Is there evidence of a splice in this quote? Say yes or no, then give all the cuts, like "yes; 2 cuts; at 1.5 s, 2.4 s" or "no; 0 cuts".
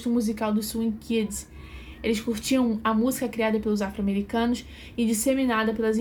no; 0 cuts